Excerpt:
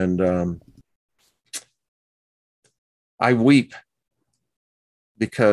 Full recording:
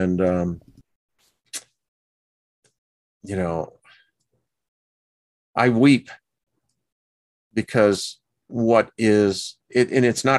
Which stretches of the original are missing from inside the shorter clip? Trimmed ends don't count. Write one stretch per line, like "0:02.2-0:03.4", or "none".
0:03.1-0:05.5